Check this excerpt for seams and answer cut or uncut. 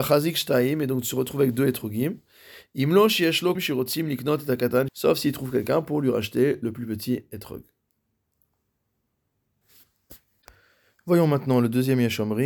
cut